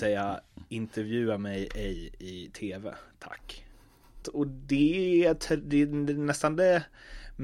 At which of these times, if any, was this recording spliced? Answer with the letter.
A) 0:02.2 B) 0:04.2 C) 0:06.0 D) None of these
B